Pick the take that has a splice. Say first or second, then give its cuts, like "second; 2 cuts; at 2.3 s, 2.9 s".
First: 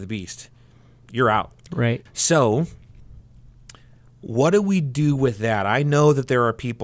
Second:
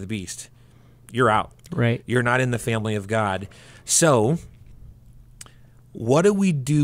first; 1 cut; at 2.1 s